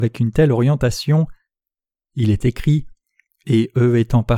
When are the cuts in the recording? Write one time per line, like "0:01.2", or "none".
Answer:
none